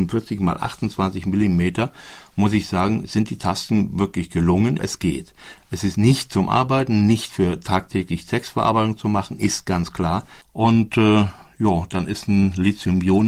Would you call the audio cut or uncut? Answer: cut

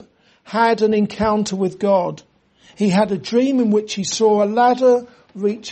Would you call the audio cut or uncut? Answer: uncut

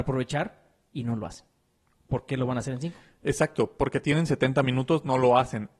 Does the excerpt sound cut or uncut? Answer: uncut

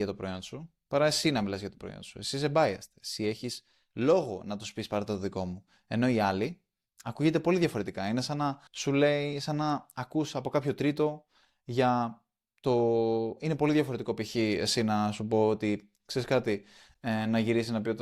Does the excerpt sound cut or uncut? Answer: cut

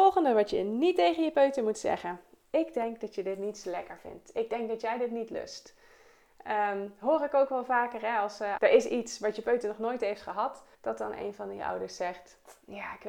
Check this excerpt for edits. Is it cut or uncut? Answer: cut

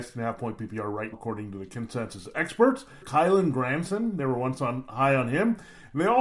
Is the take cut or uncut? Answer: cut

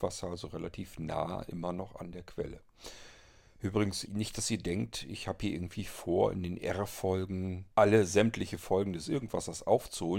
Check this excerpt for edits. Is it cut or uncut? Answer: cut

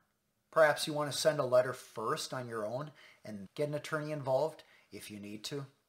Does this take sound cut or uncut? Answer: cut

